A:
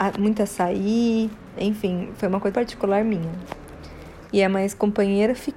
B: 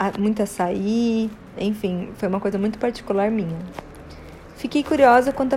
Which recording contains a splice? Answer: A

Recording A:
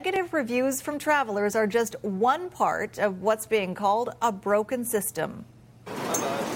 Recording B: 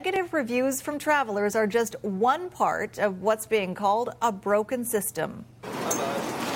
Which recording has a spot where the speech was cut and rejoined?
B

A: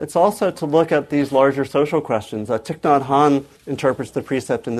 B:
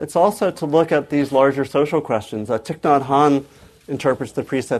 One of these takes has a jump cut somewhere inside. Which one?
A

